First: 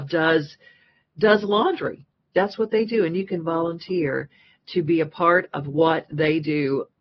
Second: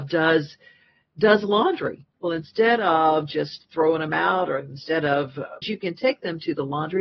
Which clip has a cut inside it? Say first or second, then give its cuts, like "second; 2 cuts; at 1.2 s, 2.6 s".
second; 2 cuts; at 2.1 s, 5.6 s